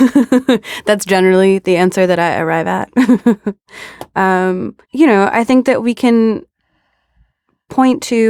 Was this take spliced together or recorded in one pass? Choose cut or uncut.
cut